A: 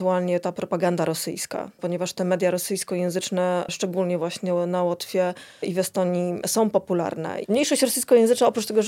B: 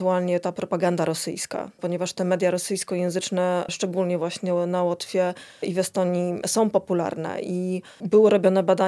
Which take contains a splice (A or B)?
A